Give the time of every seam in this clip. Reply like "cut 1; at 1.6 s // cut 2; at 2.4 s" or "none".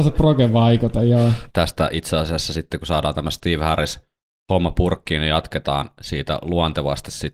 cut 1; at 1.5 s